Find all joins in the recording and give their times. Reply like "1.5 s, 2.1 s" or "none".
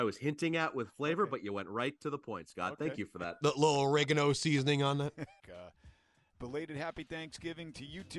5.4 s